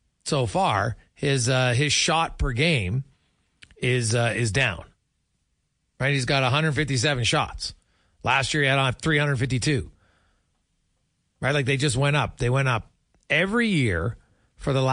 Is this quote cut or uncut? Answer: uncut